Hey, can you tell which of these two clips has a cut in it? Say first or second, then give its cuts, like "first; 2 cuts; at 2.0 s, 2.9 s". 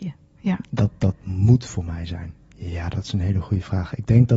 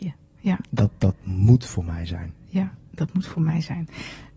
first; 1 cut; at 2.4 s